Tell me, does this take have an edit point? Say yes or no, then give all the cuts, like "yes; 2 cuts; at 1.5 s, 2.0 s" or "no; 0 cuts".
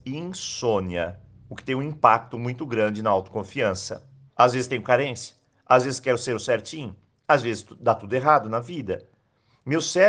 yes; 1 cut; at 4.3 s